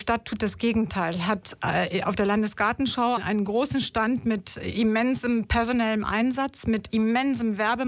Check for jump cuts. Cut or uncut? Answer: cut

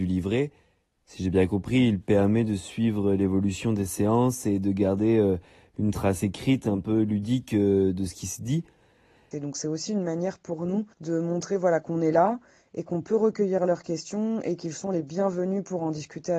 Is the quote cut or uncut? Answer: cut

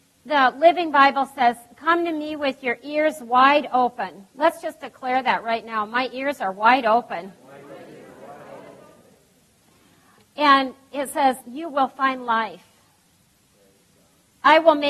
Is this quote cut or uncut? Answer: cut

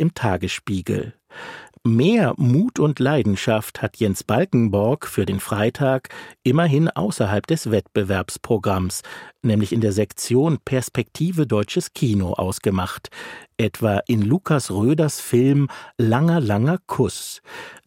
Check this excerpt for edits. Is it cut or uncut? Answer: uncut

